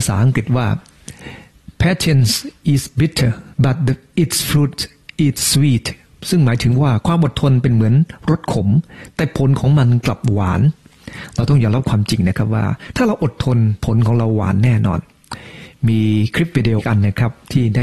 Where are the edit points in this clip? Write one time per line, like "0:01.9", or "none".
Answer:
0:03.5
0:13.8
0:16.8